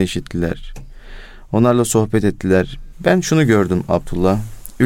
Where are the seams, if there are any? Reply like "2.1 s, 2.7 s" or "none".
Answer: 2.9 s